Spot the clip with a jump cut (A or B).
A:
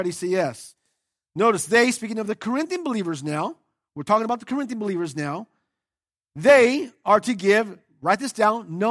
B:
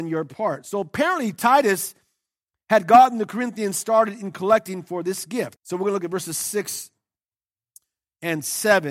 B